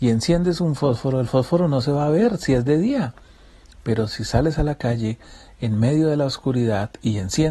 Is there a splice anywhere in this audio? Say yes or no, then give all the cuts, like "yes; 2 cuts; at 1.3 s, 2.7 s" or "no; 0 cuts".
no; 0 cuts